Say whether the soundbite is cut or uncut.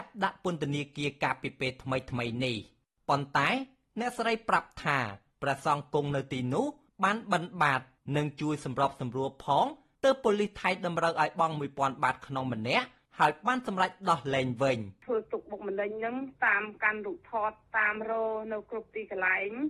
uncut